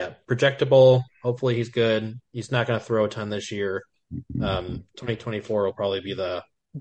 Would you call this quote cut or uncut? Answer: uncut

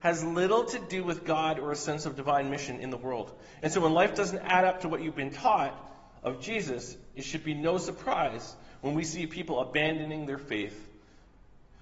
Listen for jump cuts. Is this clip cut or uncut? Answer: cut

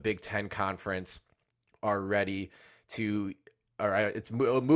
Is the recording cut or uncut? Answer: uncut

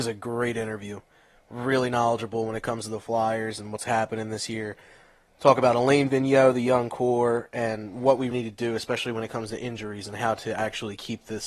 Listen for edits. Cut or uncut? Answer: cut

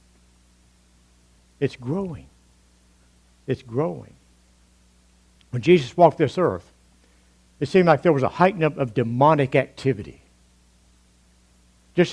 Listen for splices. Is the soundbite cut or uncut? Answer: uncut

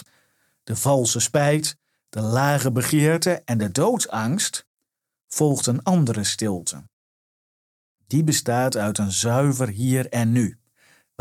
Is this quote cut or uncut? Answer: uncut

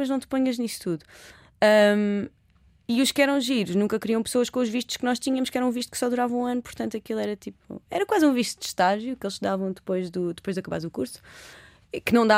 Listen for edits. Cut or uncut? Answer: uncut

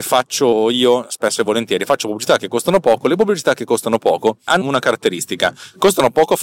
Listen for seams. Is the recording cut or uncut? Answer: cut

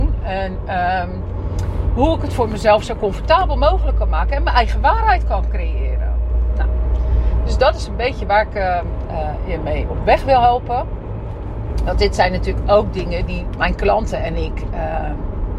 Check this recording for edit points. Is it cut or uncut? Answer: cut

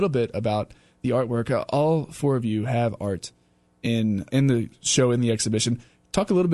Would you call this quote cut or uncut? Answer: cut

